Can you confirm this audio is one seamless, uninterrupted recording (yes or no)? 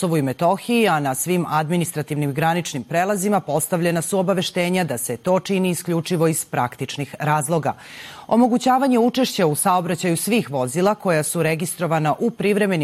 yes